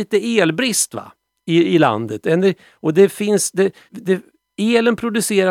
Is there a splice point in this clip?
yes; 1 cut; at 3.9 s

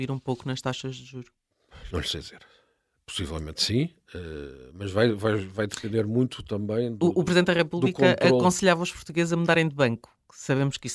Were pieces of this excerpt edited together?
no; 0 cuts

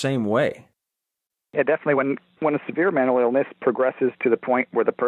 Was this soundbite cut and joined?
no; 0 cuts

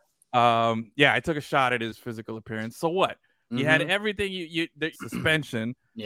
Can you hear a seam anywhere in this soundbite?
yes; 2 cuts; at 3.5 s, 4.9 s

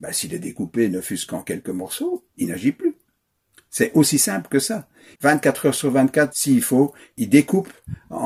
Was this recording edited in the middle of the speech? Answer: yes; 2 cuts; at 5.1 s, 6.3 s

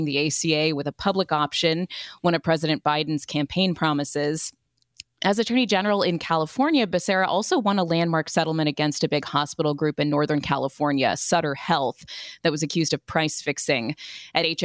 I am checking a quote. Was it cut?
no; 0 cuts

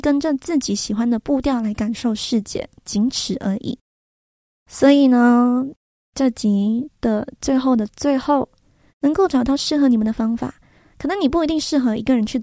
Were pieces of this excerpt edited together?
yes; 1 cut; at 8.9 s

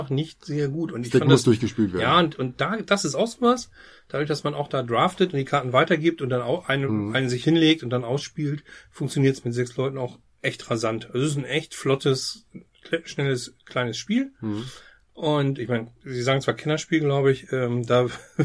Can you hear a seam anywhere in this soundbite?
no; 0 cuts

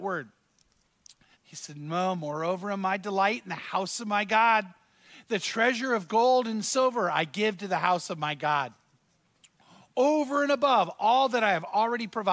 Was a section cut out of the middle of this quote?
yes; 1 cut; at 1.3 s

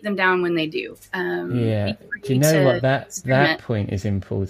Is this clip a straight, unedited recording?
yes; 0 cuts

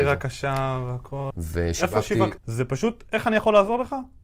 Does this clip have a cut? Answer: yes; 2 cuts; at 1.3 s, 2.4 s

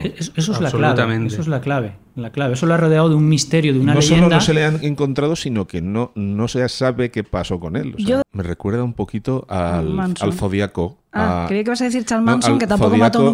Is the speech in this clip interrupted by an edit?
yes; 1 cut; at 8.2 s

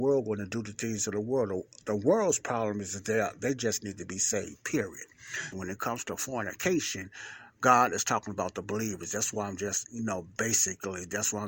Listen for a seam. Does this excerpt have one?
yes; 1 cut; at 5.5 s

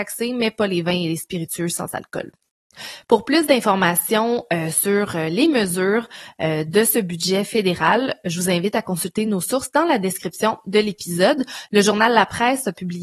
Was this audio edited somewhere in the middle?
no; 0 cuts

